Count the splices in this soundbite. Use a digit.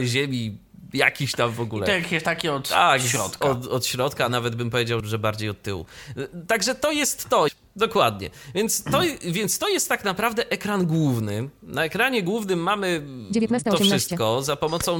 2